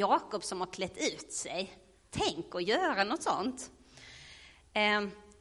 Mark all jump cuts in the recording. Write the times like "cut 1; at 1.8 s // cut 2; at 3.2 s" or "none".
none